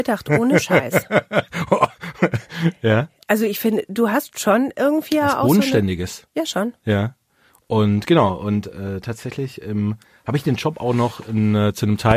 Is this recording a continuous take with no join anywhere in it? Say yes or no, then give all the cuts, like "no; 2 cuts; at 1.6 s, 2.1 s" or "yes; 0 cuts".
yes; 0 cuts